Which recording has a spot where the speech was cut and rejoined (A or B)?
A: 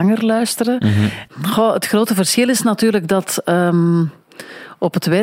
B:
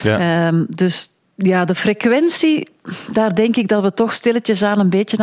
A